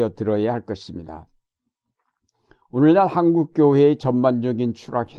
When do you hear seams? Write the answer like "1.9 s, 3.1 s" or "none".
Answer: none